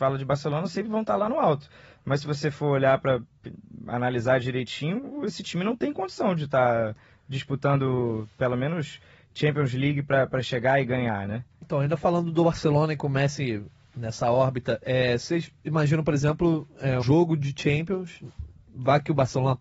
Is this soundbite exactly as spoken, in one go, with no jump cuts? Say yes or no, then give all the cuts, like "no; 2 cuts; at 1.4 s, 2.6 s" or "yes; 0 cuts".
no; 1 cut; at 17.0 s